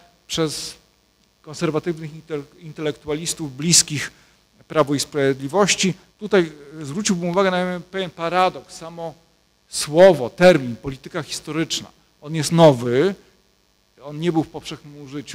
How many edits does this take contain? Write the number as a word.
one